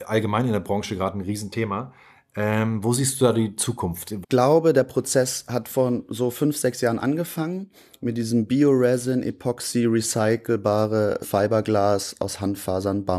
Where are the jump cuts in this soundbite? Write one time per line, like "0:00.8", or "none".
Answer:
0:04.2
0:11.2